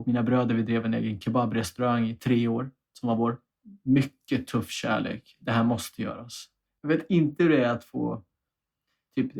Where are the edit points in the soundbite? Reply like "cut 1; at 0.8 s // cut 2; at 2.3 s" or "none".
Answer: none